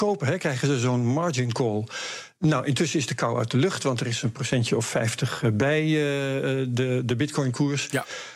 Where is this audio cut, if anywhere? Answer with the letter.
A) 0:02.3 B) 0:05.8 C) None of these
C